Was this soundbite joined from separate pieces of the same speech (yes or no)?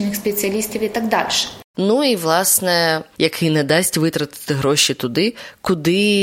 yes